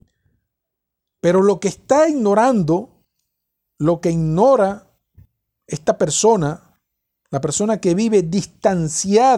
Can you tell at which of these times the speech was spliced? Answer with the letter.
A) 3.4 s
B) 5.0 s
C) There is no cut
C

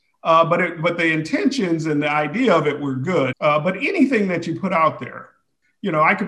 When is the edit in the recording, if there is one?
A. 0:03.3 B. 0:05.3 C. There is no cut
A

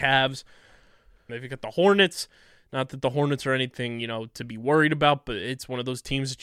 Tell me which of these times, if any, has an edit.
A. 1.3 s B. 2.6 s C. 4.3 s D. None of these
A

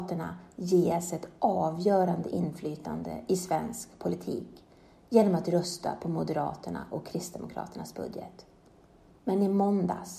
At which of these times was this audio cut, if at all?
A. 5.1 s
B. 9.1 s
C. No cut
B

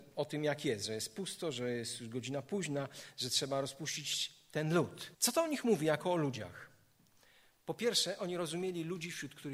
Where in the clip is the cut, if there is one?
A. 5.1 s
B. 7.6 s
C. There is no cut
A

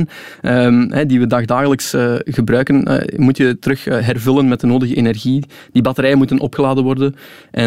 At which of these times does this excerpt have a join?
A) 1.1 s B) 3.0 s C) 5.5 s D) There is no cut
D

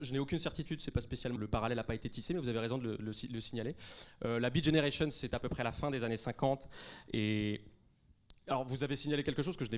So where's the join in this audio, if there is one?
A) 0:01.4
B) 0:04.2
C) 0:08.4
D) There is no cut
A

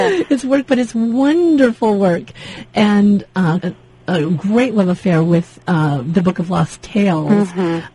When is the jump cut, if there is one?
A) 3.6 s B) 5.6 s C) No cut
A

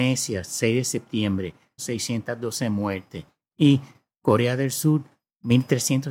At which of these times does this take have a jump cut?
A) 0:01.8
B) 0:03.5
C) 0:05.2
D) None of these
A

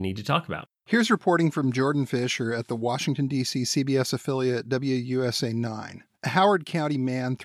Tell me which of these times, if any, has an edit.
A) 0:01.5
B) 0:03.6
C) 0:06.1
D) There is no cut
C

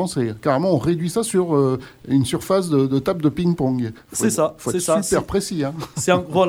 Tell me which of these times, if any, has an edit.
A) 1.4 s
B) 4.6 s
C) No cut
C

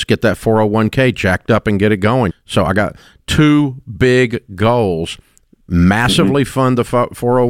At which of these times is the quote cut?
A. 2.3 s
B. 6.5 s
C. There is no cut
A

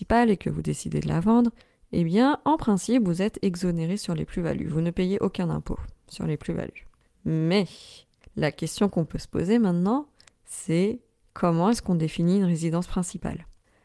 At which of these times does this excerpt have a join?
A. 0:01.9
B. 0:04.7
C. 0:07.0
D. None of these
D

